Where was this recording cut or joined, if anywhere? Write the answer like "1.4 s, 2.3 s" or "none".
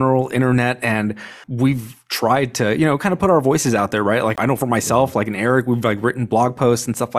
none